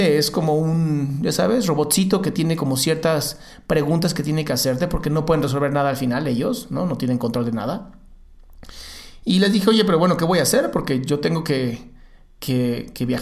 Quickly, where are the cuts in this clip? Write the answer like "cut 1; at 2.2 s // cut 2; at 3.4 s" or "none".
none